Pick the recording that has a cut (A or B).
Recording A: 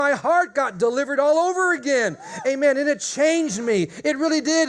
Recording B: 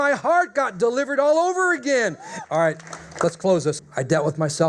B